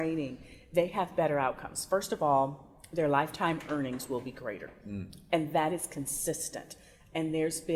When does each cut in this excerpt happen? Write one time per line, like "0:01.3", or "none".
none